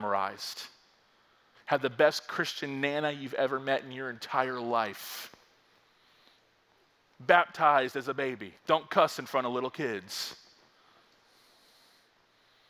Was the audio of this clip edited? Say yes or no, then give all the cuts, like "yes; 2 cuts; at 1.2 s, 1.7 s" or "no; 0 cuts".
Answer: yes; 1 cut; at 8.6 s